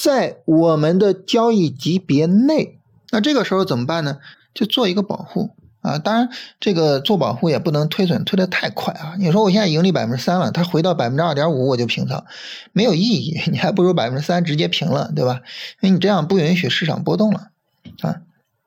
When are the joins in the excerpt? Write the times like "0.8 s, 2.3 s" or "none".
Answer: 3.1 s, 4.3 s